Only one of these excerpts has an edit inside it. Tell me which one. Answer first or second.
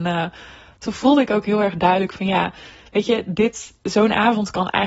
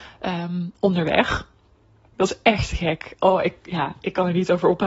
second